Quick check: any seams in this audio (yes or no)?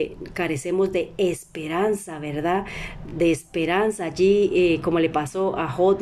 no